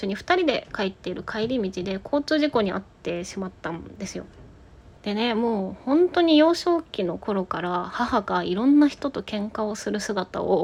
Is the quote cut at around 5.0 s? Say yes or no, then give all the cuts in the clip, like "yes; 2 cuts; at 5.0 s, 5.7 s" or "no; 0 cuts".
yes; 1 cut; at 5.0 s